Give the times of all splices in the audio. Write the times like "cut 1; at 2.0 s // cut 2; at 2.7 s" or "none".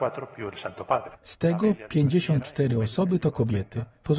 cut 1; at 1.1 s